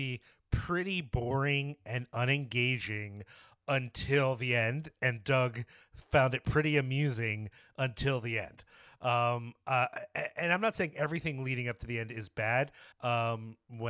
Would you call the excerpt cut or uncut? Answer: cut